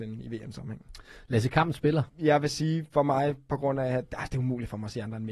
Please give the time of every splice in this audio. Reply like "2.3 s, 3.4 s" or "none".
2.1 s